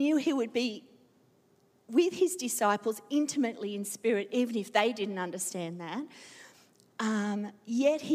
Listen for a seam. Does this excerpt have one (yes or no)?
no